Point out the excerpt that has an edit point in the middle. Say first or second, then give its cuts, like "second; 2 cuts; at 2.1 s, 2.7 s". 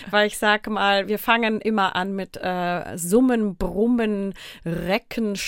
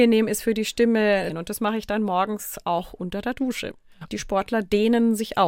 second; 2 cuts; at 1.3 s, 4.1 s